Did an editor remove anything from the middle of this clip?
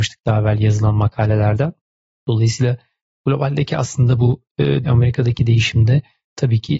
yes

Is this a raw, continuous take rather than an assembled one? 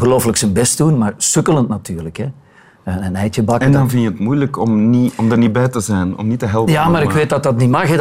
yes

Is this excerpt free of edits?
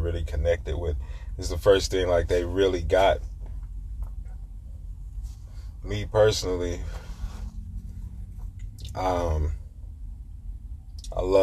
yes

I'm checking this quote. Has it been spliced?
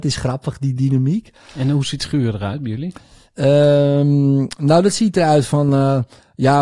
no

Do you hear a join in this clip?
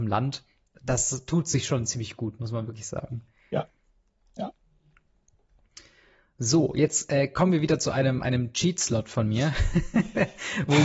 no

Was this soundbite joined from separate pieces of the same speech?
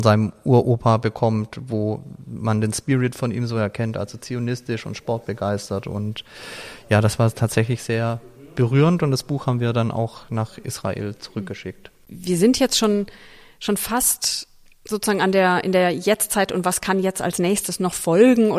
no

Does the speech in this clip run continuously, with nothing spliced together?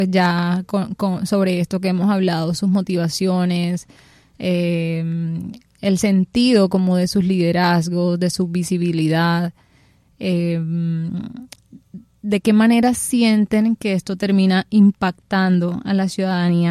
yes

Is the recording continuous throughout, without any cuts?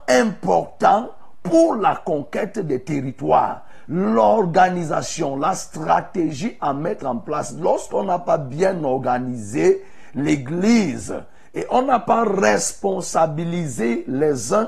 yes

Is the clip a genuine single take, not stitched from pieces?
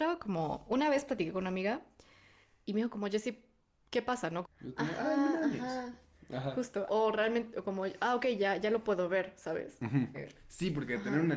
no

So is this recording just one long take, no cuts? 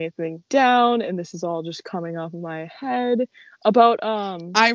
yes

